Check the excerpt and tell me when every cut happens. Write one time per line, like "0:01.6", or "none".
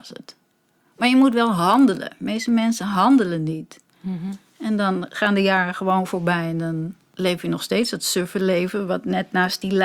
none

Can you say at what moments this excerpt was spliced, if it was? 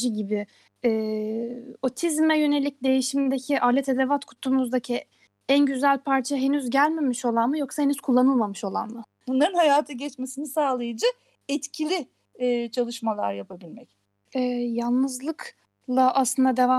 0:09.2
0:14.3

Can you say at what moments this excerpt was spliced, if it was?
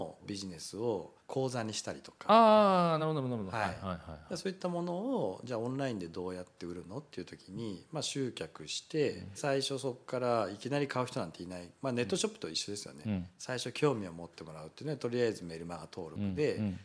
none

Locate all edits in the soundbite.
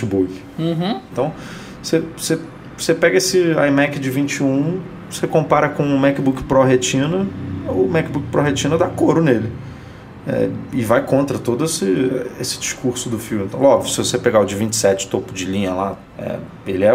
0:01.1

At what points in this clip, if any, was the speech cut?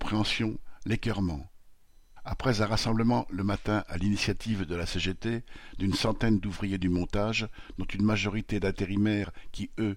0:02.2

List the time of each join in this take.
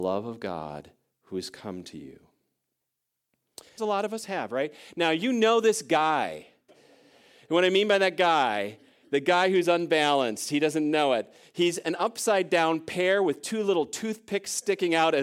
0:03.8
0:06.7

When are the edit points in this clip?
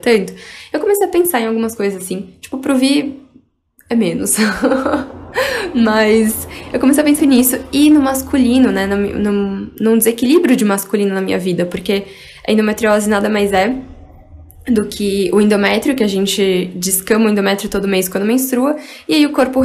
0:07.2

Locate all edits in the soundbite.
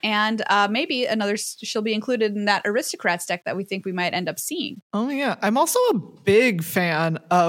none

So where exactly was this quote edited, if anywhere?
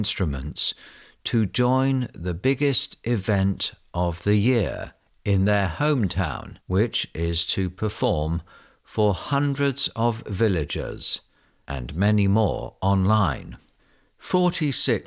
0:06.6

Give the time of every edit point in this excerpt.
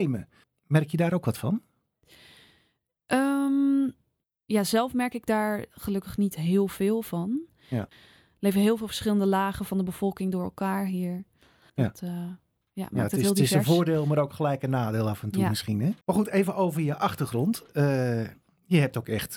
0:07.9
0:16.0

